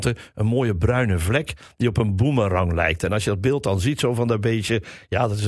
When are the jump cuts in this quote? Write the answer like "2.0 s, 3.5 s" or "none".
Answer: none